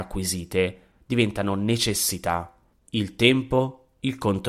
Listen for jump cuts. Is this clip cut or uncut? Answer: cut